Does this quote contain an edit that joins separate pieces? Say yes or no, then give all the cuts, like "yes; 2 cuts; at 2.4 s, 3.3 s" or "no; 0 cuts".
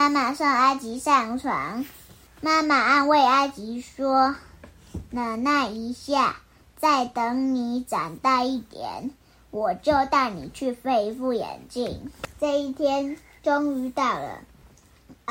no; 0 cuts